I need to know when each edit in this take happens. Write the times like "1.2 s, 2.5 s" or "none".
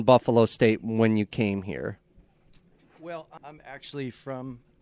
3.4 s